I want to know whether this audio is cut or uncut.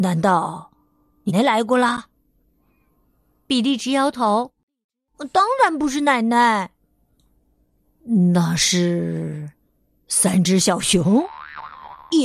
cut